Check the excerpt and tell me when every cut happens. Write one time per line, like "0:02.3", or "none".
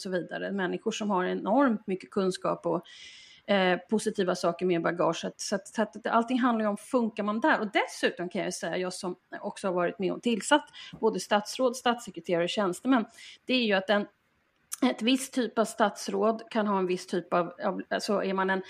0:17.6